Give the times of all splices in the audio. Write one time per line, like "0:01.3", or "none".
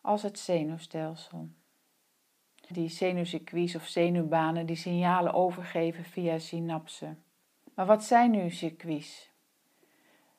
0:02.7
0:07.7